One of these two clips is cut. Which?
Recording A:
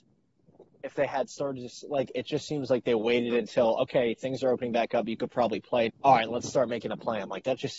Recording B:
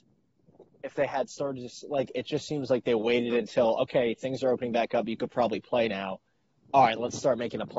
A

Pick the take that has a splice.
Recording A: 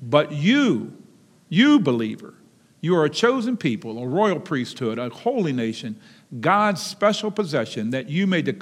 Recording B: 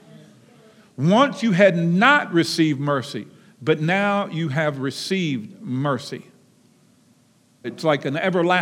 B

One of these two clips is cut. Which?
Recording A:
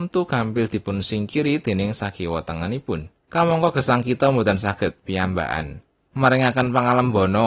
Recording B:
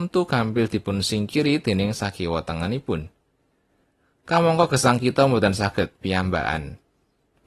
A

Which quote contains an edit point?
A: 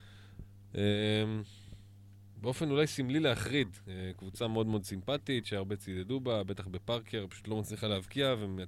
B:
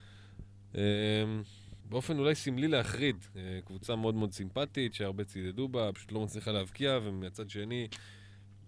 B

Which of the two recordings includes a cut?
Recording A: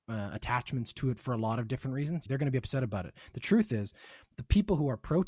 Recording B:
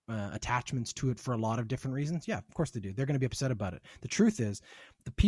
A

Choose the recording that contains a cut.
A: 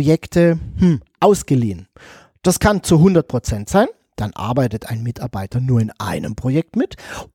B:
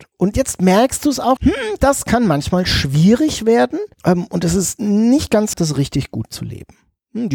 B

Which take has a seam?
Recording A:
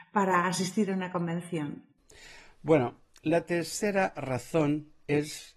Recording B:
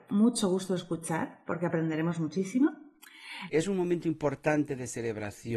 B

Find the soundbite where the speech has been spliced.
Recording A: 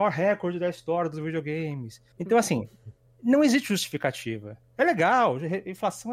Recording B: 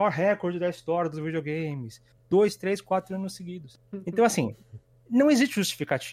A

